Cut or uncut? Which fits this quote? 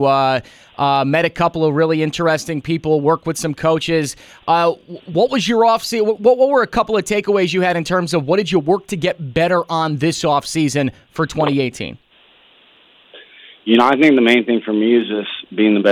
uncut